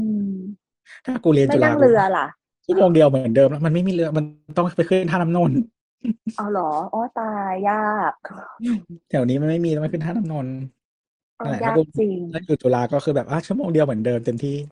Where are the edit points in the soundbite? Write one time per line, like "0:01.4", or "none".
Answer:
none